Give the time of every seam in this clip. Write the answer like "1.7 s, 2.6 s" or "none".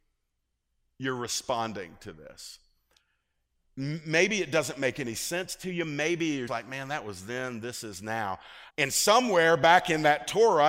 6.5 s, 8.7 s